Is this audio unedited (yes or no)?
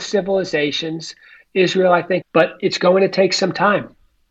no